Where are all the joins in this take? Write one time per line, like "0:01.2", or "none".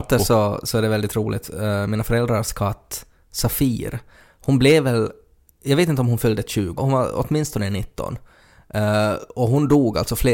0:06.8